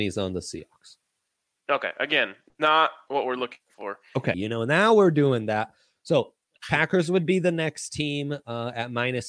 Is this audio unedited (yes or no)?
no